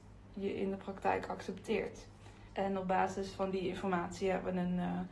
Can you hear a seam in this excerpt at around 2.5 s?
yes; 1 cut; at 2.5 s

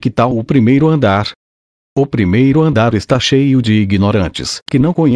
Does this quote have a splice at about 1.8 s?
no; 0 cuts

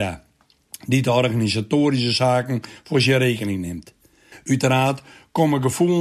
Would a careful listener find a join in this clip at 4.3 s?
yes; 1 cut; at 4.3 s

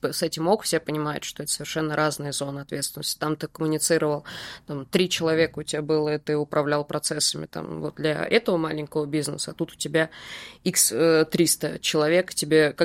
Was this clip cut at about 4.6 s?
no; 0 cuts

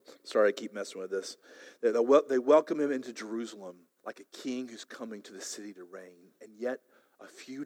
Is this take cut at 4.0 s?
yes; 1 cut; at 4.0 s

